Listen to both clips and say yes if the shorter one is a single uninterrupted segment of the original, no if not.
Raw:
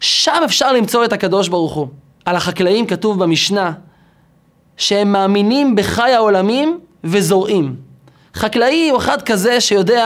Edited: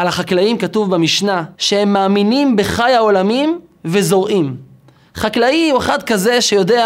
no